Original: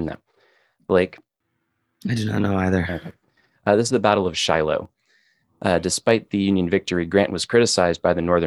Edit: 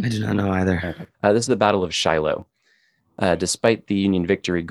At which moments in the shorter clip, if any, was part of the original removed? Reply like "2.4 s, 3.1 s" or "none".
1.1 s